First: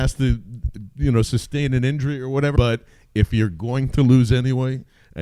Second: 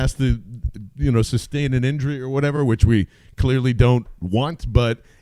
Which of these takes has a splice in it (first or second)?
first